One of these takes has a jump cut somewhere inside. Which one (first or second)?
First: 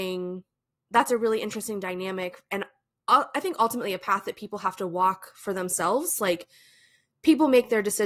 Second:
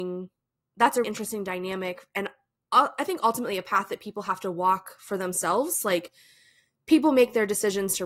second